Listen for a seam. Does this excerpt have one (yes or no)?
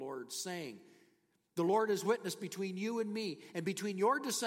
no